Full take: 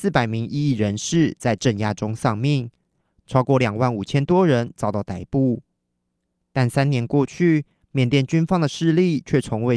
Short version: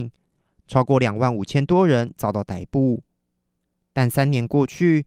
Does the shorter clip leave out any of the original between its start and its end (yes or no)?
no